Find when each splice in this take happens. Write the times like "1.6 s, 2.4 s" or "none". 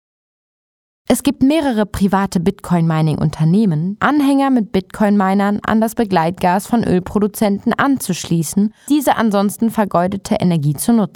4.0 s, 8.9 s